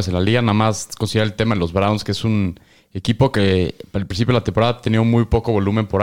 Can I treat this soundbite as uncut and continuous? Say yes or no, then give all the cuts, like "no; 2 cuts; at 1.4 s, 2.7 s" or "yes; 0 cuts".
yes; 0 cuts